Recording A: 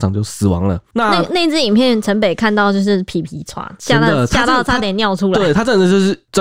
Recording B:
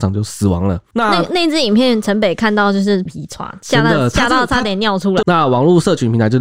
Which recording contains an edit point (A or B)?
B